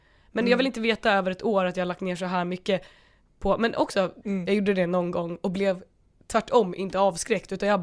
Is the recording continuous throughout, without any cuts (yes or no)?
yes